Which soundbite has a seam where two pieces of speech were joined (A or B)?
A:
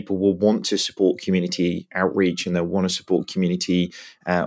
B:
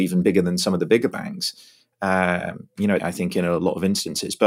B